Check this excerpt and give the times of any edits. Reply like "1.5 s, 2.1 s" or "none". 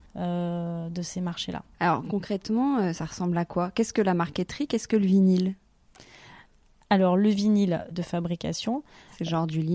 1.7 s, 7.9 s